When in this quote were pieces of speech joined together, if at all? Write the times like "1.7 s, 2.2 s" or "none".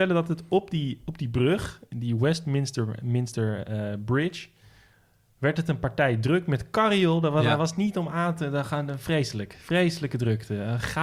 none